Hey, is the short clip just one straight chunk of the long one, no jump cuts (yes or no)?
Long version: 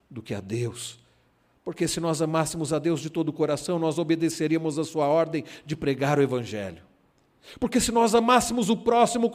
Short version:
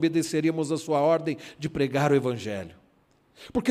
yes